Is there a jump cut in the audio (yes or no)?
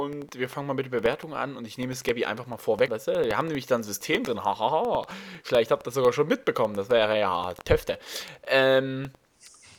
yes